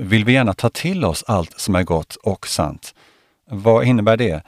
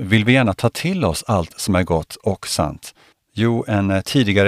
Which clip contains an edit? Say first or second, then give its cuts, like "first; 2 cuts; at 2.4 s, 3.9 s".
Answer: second; 1 cut; at 3.1 s